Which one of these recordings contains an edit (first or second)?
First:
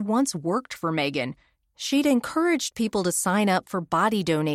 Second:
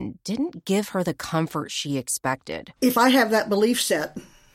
second